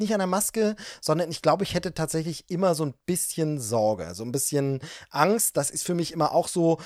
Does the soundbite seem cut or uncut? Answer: cut